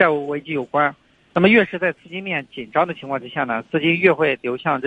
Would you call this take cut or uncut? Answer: cut